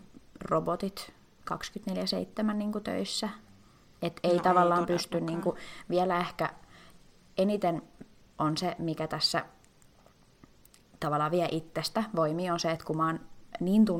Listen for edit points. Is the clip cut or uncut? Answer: uncut